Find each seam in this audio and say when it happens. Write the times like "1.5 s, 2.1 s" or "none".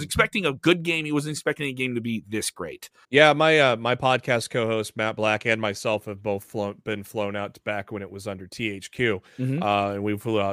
3.0 s